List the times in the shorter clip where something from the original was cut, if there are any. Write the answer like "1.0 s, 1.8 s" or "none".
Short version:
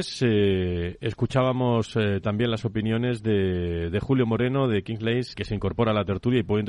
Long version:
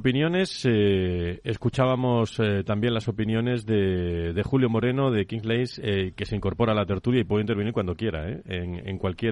5.3 s